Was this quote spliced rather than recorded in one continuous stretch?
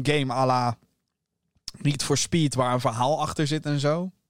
no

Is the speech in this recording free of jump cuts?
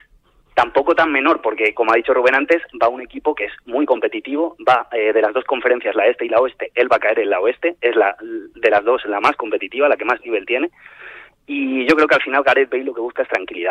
yes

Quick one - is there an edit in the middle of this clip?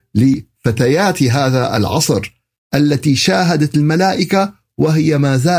no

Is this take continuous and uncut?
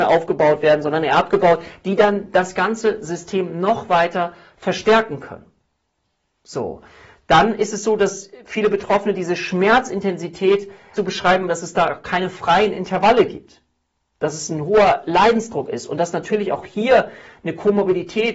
no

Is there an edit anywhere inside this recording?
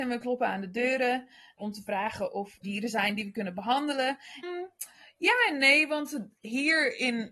yes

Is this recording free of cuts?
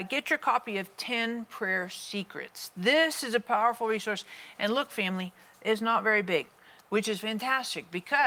yes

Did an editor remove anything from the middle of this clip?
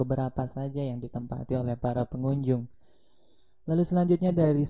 no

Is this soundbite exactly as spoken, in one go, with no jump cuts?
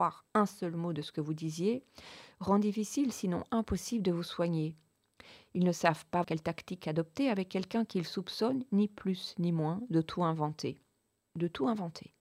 no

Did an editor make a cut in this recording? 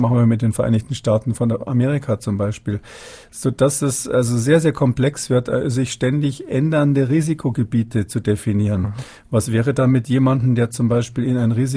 no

